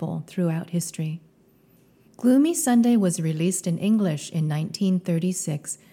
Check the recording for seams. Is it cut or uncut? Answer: cut